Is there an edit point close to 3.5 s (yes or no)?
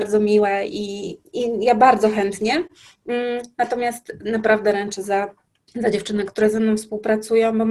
no